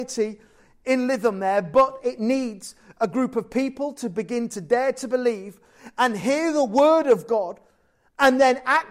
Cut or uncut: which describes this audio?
uncut